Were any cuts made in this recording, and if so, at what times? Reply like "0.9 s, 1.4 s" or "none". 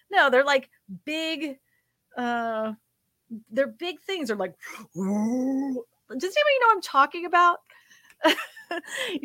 none